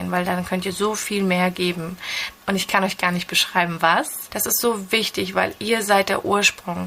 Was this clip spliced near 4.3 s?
yes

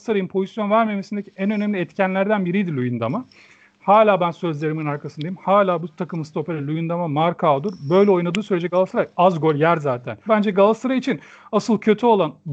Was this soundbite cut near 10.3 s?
yes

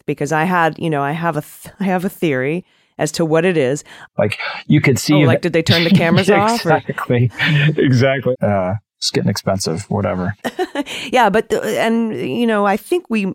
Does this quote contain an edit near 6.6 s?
no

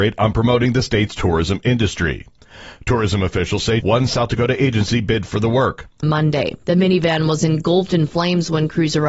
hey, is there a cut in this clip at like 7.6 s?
no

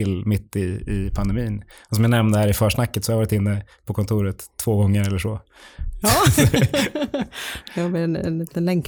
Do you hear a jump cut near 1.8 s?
no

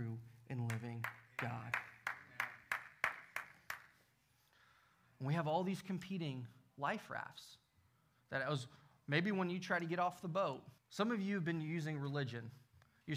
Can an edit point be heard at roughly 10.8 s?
yes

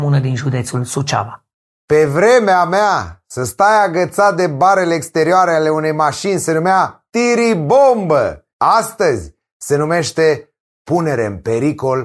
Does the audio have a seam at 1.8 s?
no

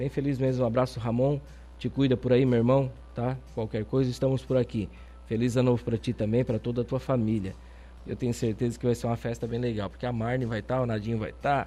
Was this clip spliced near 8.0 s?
yes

